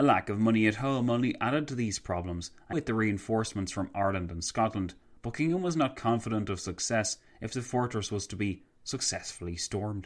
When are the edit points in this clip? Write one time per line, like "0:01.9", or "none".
0:02.7